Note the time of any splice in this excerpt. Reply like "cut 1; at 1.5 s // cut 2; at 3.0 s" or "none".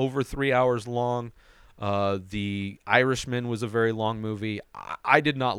none